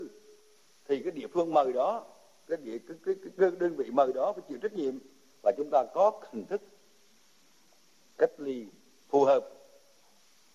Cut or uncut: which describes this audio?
uncut